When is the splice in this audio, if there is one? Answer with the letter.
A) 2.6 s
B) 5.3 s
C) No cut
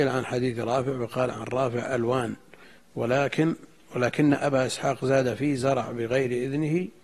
C